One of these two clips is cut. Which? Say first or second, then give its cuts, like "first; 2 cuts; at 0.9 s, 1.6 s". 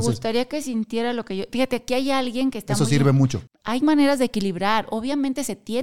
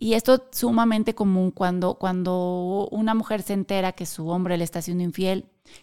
first; 1 cut; at 3.5 s